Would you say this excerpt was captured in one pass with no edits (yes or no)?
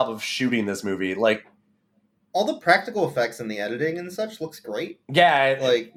yes